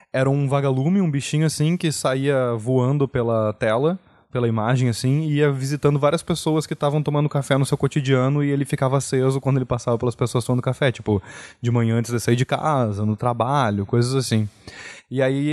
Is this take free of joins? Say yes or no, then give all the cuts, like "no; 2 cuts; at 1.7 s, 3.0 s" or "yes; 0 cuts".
yes; 0 cuts